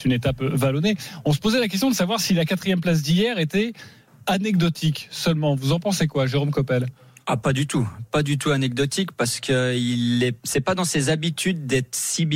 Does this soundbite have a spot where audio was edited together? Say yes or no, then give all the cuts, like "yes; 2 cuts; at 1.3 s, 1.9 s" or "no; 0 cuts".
no; 0 cuts